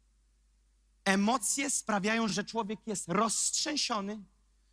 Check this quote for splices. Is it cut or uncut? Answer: uncut